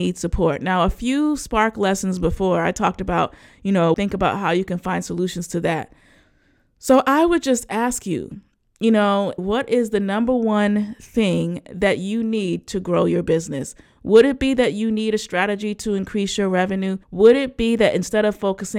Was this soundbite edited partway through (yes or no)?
yes